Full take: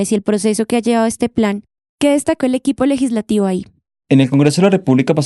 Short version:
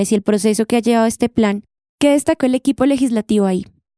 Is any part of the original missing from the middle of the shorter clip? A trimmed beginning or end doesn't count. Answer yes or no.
no